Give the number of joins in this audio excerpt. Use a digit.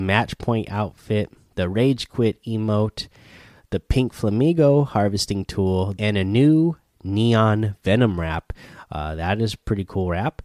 1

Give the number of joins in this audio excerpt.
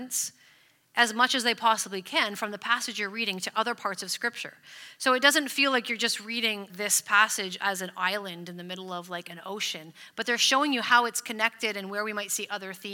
1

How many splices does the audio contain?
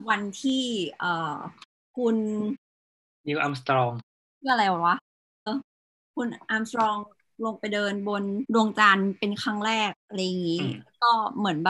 2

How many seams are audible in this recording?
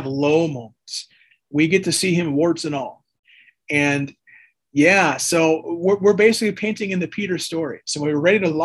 1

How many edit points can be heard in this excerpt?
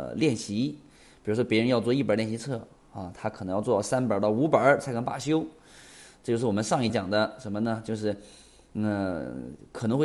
1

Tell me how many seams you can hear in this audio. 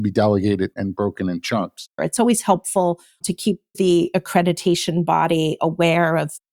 1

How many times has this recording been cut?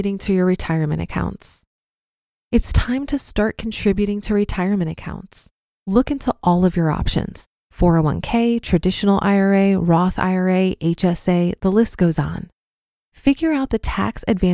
0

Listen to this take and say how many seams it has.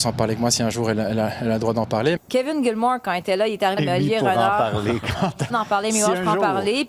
3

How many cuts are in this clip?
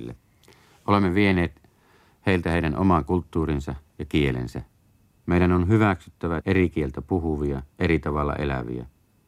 3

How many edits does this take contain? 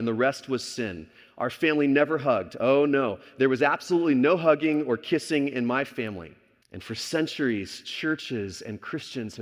1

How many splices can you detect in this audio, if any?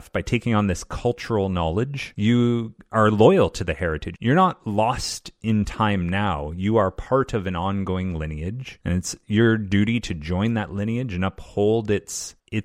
1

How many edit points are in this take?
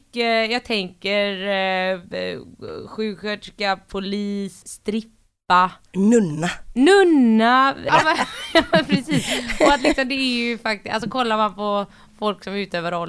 2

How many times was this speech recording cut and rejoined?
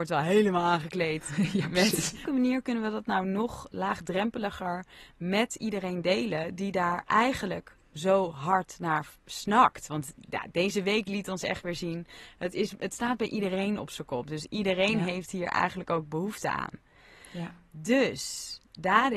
1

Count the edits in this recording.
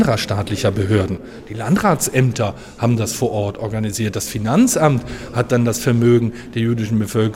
0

